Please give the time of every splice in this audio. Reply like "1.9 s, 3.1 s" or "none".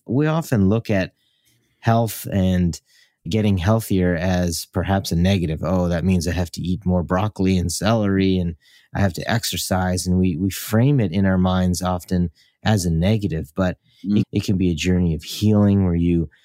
14.2 s